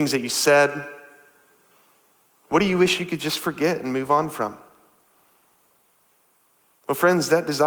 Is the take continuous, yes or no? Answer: yes